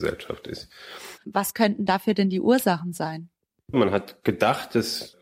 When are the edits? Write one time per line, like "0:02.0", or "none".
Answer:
0:01.2
0:03.7